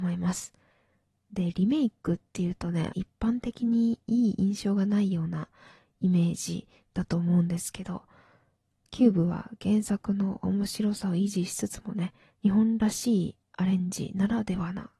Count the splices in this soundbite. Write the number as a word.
one